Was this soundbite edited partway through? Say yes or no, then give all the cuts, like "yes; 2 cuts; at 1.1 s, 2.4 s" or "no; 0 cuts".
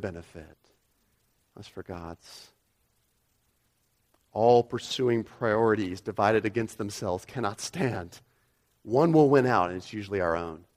no; 0 cuts